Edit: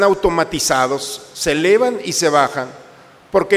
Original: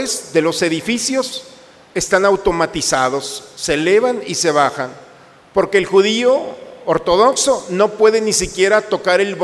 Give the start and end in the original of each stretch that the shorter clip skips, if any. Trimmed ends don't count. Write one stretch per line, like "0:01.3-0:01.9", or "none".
none